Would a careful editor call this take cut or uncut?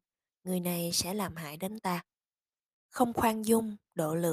cut